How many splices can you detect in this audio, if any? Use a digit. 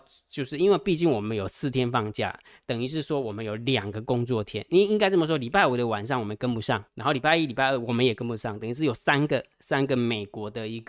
1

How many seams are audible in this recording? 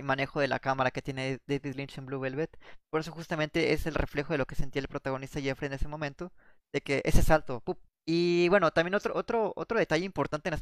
2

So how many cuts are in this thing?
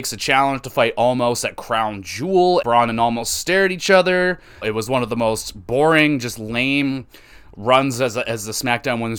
2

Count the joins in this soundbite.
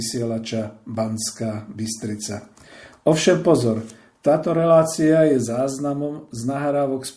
0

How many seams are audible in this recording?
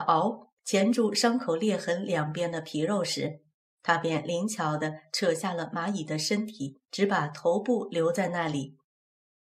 0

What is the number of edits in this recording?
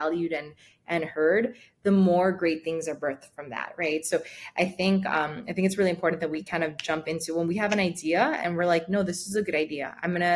0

